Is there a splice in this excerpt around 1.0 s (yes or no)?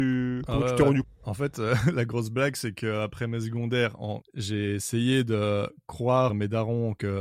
yes